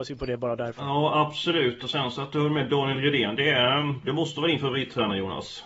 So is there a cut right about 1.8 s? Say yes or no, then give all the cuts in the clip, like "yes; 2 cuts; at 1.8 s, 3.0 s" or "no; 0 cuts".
no; 0 cuts